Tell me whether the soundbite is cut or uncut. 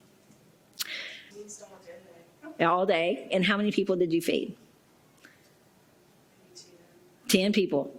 cut